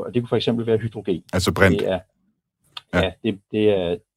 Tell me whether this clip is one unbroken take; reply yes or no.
no